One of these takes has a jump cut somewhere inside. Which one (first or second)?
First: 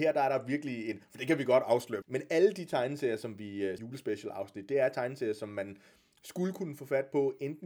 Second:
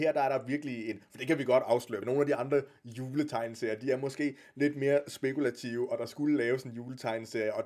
first